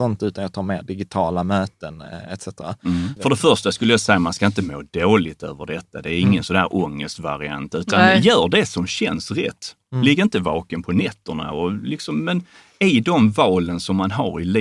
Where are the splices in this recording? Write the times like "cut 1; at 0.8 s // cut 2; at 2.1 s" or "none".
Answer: cut 1; at 3.2 s